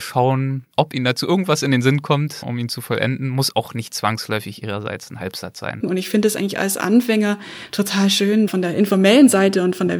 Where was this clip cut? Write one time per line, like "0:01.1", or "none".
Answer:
0:02.4
0:05.8
0:08.5